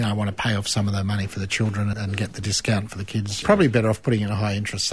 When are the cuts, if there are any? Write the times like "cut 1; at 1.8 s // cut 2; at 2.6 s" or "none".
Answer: cut 1; at 1.9 s // cut 2; at 3.4 s